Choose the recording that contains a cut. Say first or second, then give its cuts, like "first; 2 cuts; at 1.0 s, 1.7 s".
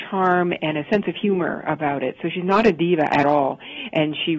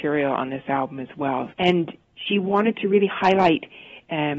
second; 1 cut; at 1.5 s